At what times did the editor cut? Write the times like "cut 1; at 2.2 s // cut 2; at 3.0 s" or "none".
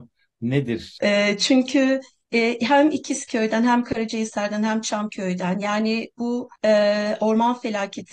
cut 1; at 1.0 s // cut 2; at 6.6 s